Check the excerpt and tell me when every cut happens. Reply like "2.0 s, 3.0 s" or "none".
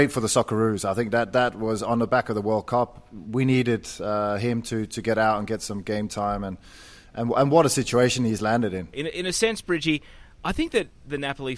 8.9 s